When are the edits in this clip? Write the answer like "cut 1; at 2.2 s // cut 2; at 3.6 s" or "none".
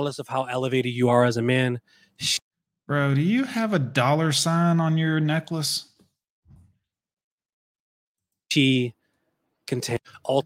none